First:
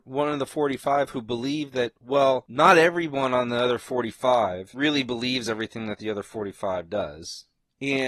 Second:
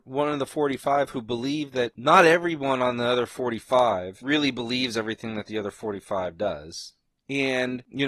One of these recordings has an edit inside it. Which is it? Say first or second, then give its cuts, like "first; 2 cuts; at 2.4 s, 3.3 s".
second; 1 cut; at 1.9 s